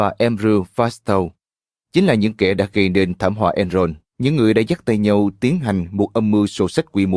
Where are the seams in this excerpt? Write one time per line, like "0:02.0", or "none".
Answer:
0:04.1